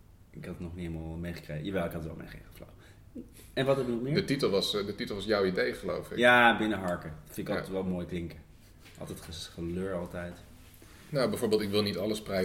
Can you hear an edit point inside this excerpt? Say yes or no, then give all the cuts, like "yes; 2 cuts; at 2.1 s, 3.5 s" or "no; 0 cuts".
no; 0 cuts